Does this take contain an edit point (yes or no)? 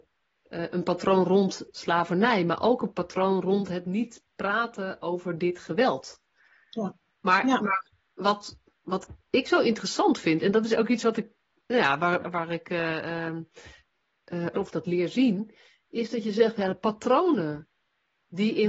yes